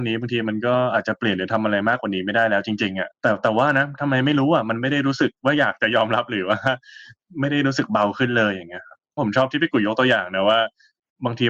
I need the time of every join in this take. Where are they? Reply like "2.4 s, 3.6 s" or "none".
3.1 s